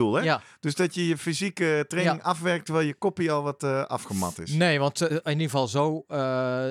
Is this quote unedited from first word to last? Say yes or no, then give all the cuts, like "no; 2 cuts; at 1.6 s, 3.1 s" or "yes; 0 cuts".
yes; 0 cuts